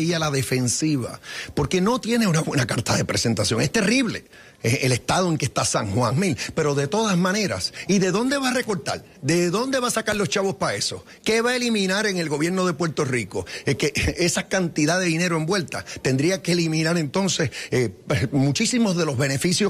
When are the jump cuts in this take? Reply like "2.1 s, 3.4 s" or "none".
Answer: 6.1 s